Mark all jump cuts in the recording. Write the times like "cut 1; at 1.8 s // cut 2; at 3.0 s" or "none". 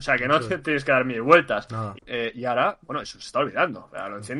cut 1; at 1.9 s